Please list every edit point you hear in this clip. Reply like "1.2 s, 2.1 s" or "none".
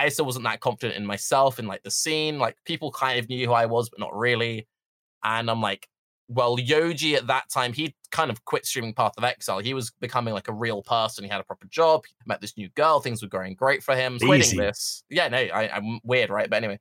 12.2 s, 14.2 s